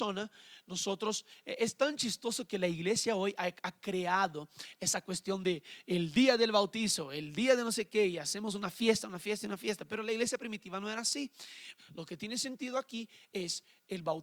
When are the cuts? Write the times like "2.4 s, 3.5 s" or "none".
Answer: 11.8 s